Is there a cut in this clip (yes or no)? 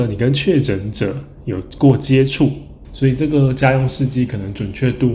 yes